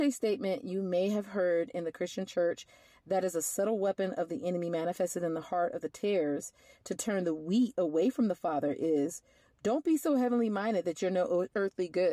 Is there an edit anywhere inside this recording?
no; 0 cuts

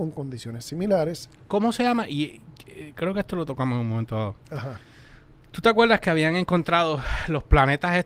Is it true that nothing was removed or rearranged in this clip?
yes; 0 cuts

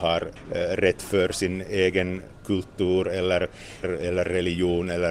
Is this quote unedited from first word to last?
no; 1 cut; at 3.8 s

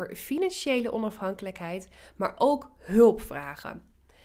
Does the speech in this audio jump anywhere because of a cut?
no; 0 cuts

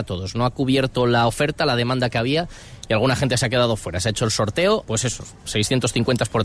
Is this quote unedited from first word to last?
no; 1 cut; at 4.8 s

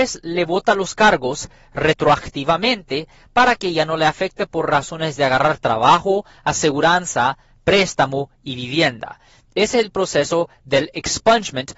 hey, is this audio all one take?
yes; 0 cuts

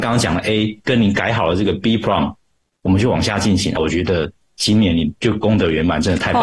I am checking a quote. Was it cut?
yes; 1 cut; at 3.8 s

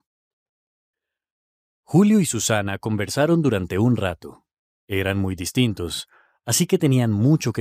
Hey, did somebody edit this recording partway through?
no; 0 cuts

